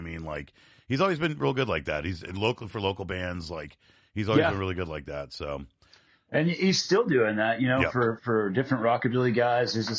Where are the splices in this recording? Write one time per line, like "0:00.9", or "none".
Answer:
none